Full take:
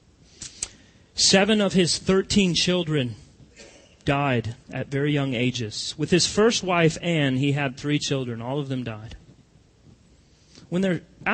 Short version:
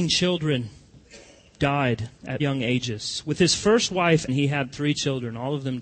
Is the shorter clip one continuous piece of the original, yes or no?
no